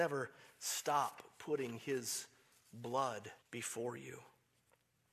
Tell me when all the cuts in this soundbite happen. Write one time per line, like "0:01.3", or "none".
0:03.4